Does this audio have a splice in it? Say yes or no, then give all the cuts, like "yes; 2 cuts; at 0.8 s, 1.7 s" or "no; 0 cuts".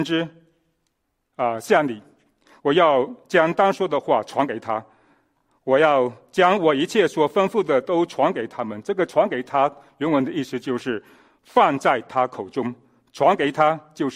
no; 0 cuts